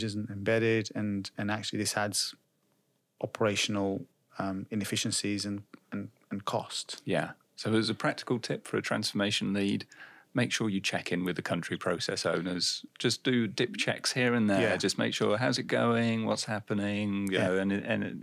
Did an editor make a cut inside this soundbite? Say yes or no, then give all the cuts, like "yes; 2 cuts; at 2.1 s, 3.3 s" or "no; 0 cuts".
no; 0 cuts